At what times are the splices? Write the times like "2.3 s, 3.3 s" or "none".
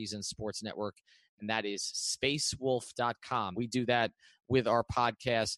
3.5 s